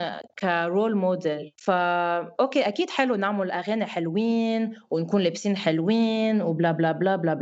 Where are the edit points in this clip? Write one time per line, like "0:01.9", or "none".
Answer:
0:01.6